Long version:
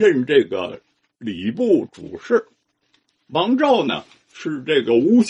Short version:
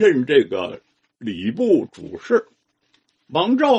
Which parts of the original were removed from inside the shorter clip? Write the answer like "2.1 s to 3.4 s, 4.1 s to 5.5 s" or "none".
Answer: none